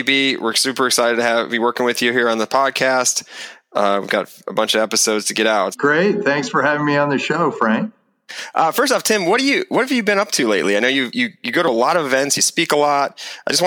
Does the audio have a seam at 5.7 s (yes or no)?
yes